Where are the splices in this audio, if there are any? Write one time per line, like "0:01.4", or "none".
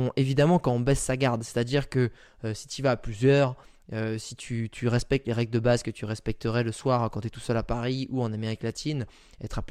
none